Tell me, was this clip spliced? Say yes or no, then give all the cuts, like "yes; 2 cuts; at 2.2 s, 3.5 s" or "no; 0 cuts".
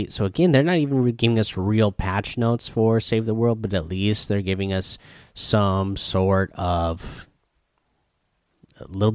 no; 0 cuts